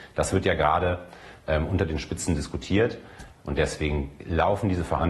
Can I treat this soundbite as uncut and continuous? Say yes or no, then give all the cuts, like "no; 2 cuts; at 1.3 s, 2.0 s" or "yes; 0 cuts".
no; 1 cut; at 3.4 s